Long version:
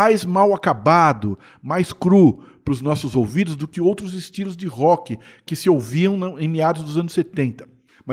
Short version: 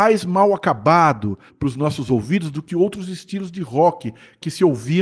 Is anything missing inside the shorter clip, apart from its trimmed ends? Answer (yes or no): yes